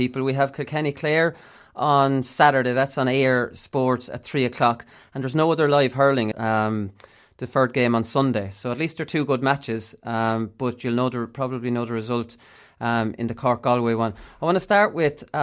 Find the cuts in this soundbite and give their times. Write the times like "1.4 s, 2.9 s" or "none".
6.3 s